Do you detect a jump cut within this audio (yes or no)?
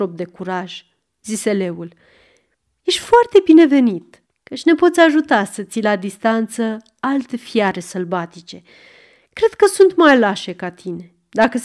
yes